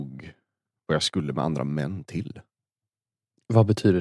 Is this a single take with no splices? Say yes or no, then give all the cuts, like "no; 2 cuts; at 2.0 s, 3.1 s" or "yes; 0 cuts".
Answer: yes; 0 cuts